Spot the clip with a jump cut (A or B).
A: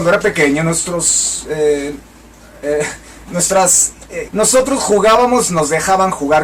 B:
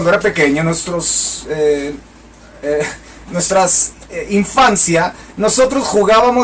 A